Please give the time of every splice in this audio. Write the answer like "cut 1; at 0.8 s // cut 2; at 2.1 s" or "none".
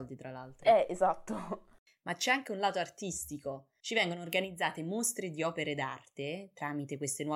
none